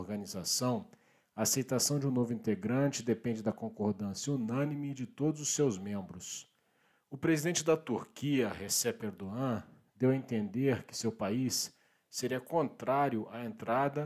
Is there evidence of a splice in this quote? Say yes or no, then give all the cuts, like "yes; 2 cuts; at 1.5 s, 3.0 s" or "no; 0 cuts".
no; 0 cuts